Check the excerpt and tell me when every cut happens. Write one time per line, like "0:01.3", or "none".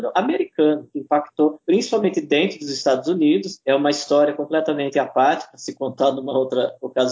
none